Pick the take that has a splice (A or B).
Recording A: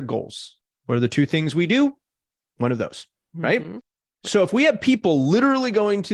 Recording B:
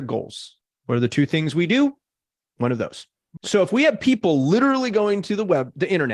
B